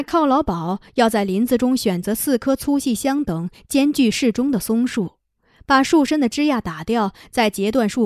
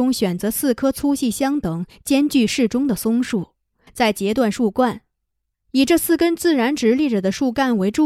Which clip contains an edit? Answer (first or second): second